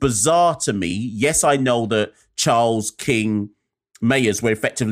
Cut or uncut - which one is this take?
uncut